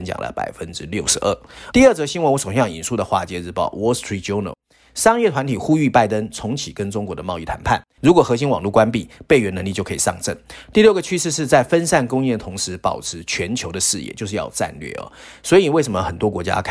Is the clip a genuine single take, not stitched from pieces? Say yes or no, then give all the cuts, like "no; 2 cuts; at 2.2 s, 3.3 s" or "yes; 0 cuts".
no; 2 cuts; at 1.7 s, 8.0 s